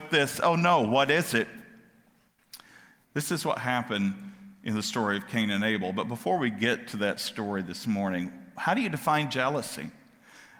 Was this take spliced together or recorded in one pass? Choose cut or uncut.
cut